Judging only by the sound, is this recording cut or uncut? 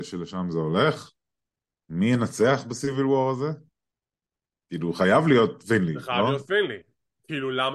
uncut